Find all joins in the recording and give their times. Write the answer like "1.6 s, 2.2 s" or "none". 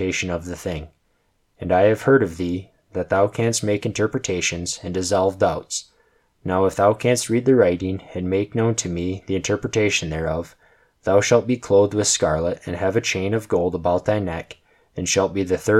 none

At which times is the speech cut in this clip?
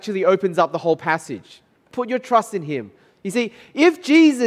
1.7 s, 3.1 s

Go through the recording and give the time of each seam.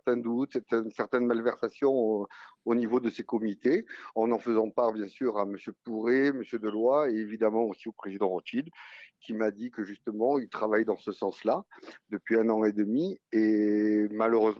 none

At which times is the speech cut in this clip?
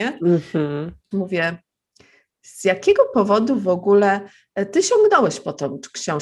1.1 s

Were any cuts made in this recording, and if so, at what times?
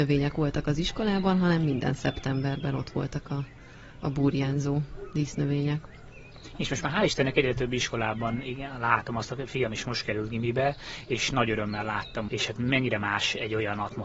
12.3 s

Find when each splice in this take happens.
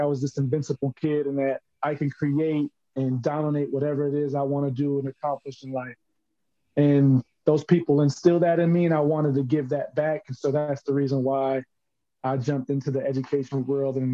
none

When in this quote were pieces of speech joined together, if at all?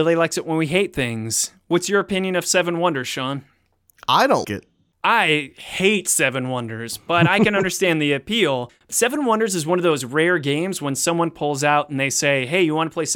4.4 s

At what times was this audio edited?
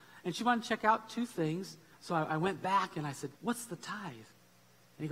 1.9 s, 3.3 s

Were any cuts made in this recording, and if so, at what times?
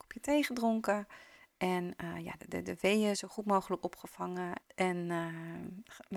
2.4 s, 4.6 s

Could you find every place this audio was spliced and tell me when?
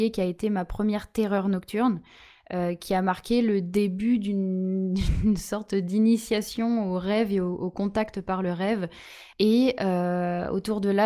9.3 s

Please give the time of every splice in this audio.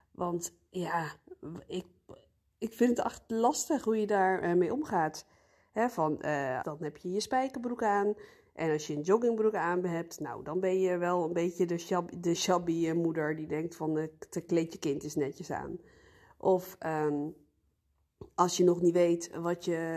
6.6 s, 12.4 s

